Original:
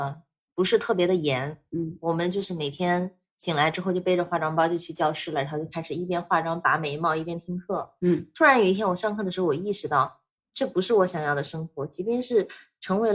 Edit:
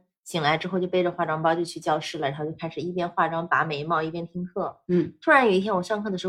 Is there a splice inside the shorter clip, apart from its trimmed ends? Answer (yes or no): no